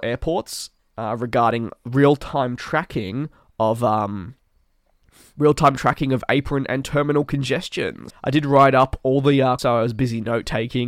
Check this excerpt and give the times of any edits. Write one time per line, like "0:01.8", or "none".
0:08.1
0:09.6